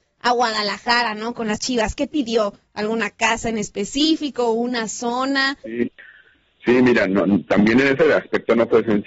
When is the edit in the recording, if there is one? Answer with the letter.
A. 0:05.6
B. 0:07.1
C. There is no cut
A